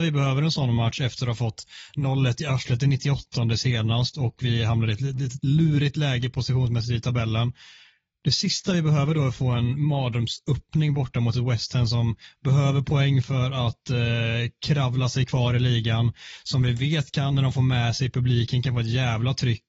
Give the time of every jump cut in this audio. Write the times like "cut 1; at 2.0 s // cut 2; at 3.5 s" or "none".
none